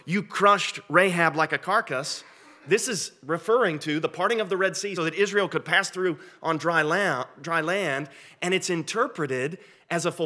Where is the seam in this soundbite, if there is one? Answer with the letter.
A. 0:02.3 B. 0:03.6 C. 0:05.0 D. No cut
C